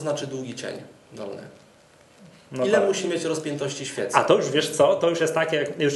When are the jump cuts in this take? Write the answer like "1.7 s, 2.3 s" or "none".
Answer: none